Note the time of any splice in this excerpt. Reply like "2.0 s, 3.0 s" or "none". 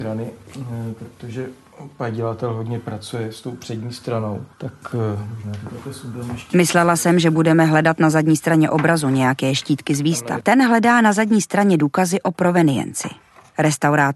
4.5 s, 10.4 s